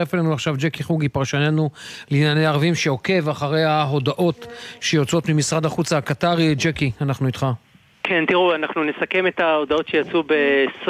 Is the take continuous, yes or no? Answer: yes